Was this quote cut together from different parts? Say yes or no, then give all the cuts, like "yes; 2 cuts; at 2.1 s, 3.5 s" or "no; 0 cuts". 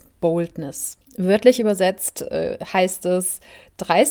yes; 1 cut; at 1.0 s